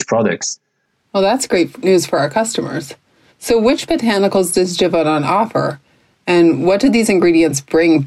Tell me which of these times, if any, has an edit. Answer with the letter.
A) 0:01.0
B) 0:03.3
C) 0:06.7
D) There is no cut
D